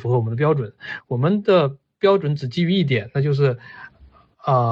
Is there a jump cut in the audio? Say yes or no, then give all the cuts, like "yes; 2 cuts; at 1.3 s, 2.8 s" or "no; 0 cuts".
no; 0 cuts